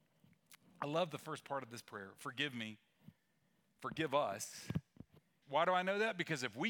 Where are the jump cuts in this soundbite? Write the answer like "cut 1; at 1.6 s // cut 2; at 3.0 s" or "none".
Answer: cut 1; at 5.4 s